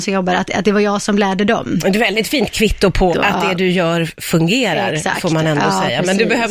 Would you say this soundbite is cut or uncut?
cut